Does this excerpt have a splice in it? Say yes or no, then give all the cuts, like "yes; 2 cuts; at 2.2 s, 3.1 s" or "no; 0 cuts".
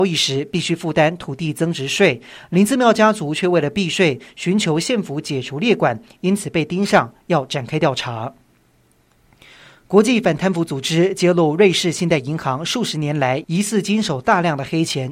no; 0 cuts